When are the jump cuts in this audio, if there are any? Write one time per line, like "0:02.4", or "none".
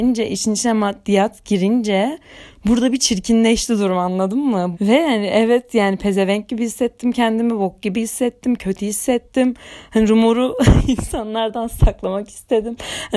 0:04.7